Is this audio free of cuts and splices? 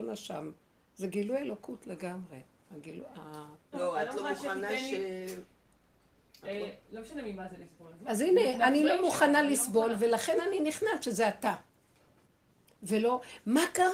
no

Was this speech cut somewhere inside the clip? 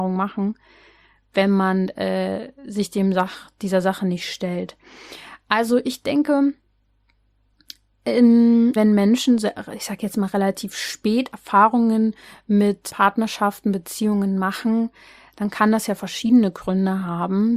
yes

